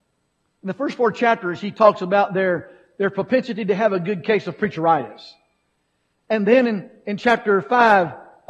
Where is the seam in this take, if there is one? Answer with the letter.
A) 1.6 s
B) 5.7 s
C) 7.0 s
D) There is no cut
D